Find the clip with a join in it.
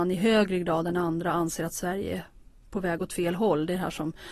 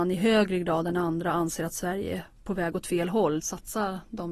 second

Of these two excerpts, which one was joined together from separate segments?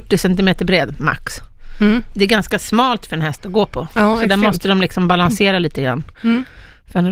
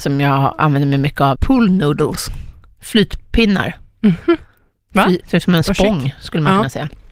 second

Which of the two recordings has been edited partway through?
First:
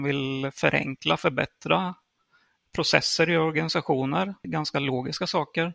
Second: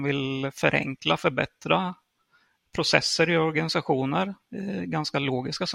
first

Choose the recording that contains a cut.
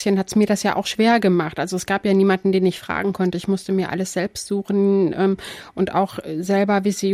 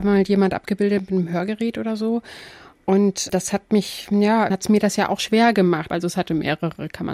second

